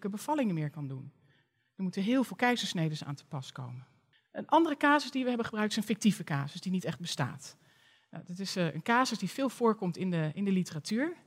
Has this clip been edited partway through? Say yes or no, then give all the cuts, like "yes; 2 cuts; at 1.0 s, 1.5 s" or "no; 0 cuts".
no; 0 cuts